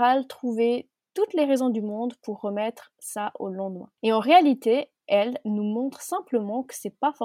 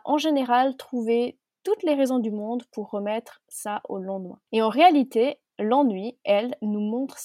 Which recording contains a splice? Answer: first; 1 cut; at 5.0 s

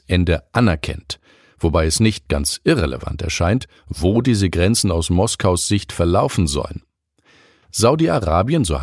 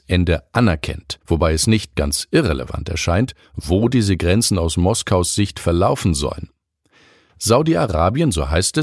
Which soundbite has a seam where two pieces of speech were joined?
second; 1 cut; at 1.2 s

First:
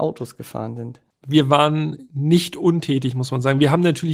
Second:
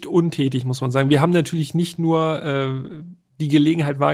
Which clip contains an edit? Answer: first; 1 cut; at 1.1 s

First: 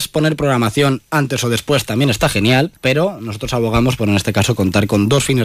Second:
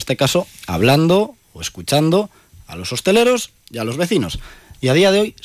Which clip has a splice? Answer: first; 1 cut; at 2.8 s

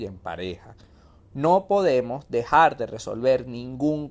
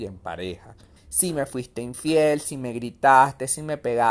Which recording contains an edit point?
second; 1 cut; at 1.0 s

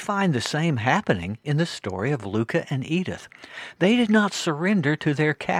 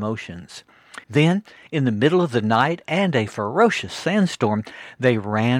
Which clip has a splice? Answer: second; 1 cut; at 1.0 s

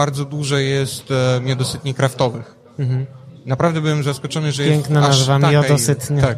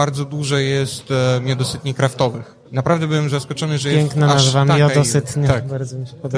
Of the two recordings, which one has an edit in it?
second; 1 cut; at 2.6 s

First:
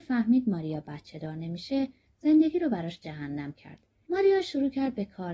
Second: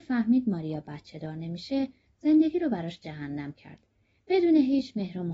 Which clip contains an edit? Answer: first; 1 cut; at 4.1 s

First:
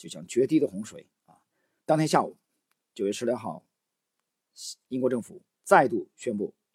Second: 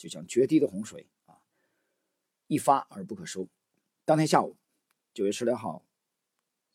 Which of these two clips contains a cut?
first; 2 cuts; at 1.8 s, 4.8 s

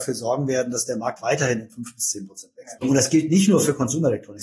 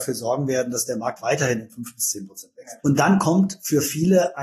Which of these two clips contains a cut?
first; 1 cut; at 2.8 s

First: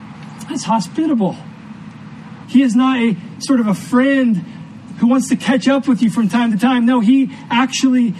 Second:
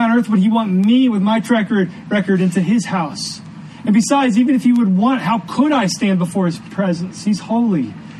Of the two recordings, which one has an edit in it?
first; 1 cut; at 2.4 s

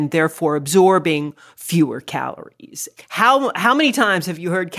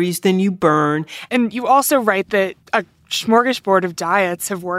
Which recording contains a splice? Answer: second; 2 cuts; at 1.3 s, 2.6 s

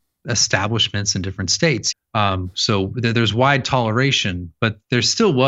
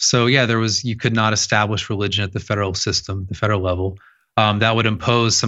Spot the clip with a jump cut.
first; 1 cut; at 1.9 s

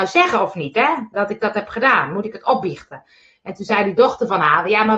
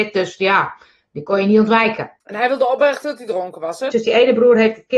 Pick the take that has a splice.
second; 2 cuts; at 2.2 s, 3.9 s

